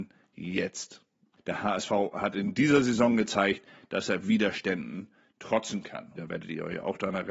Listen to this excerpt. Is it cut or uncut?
cut